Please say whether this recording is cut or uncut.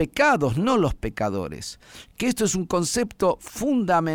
uncut